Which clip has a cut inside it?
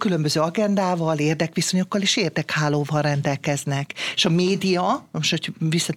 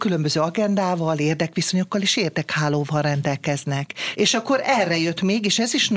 second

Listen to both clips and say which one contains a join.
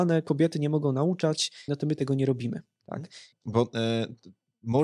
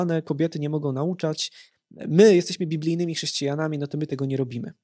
first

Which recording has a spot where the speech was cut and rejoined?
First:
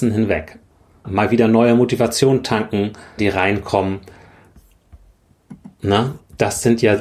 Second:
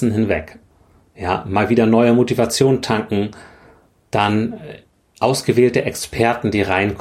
first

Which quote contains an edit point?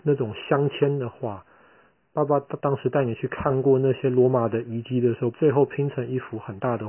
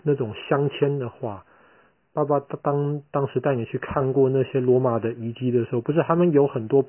first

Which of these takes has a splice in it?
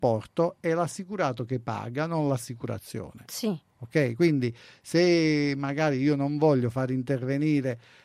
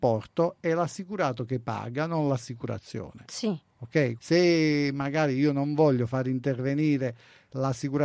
second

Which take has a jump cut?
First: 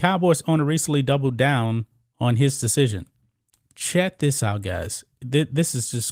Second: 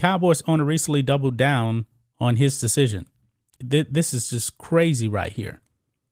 second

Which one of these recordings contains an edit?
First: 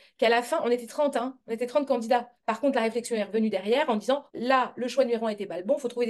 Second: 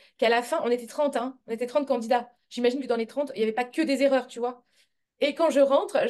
first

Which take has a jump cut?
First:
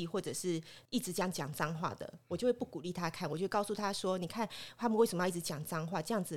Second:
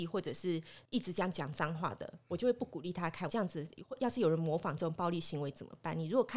second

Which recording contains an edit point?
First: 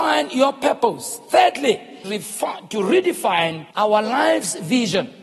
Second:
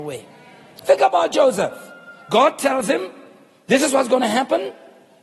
first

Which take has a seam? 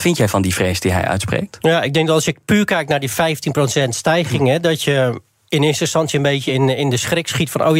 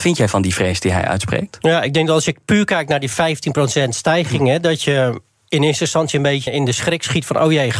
second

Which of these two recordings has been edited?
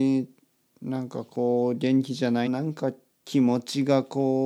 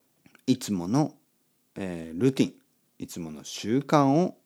first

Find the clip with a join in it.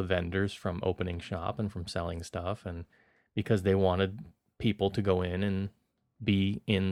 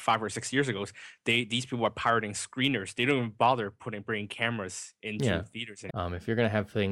second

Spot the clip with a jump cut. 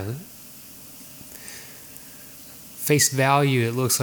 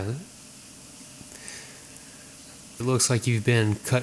second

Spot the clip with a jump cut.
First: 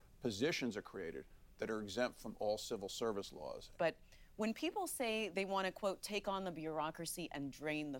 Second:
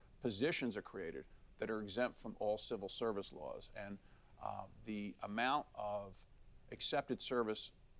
first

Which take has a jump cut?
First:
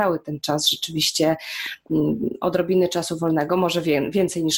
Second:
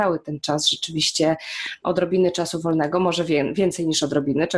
second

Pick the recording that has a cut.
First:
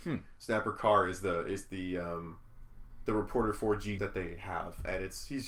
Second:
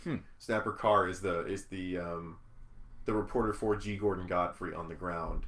first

